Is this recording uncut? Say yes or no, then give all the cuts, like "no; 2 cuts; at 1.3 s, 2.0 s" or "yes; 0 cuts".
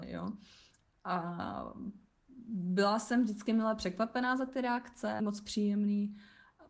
no; 1 cut; at 5.2 s